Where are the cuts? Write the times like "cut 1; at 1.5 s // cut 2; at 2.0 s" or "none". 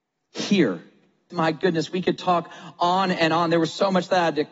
cut 1; at 1.3 s